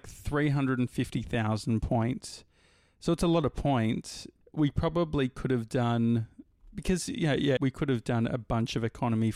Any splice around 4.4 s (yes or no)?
yes